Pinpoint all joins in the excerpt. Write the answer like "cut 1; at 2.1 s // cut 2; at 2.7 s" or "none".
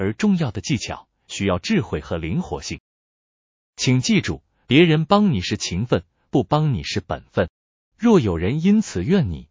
none